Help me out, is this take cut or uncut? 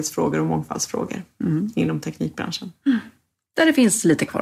uncut